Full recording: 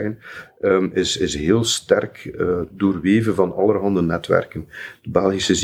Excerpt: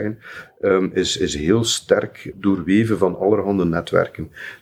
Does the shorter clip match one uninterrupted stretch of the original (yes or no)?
no